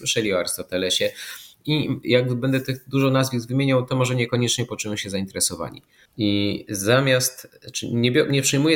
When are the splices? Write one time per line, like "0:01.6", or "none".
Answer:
0:06.1